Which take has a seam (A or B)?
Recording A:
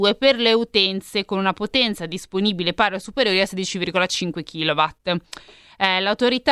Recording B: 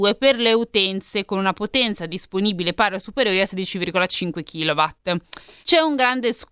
B